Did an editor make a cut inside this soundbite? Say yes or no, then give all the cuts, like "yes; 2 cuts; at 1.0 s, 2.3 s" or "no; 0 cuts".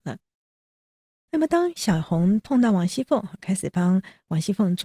no; 0 cuts